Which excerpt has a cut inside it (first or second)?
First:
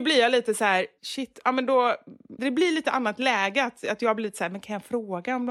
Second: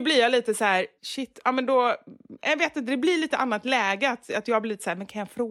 first